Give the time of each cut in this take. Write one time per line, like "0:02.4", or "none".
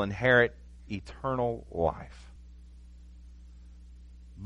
none